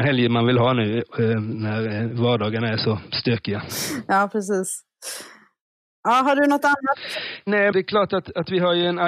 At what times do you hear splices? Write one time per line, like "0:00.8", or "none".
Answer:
0:07.7